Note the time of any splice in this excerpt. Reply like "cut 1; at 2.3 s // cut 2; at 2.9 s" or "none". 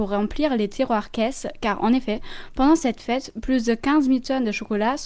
none